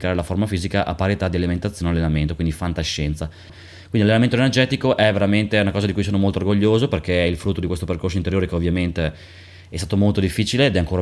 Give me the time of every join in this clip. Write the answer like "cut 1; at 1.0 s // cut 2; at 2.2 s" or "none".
cut 1; at 3.5 s